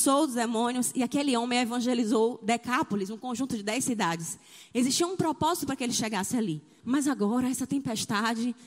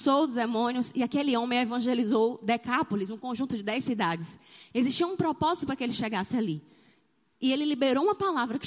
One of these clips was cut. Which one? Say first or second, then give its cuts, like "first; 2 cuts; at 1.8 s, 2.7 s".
first; 1 cut; at 6.8 s